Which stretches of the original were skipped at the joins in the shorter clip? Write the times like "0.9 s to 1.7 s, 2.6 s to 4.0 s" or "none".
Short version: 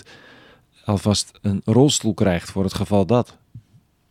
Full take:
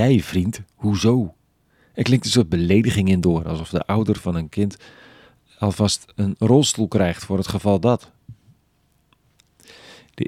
none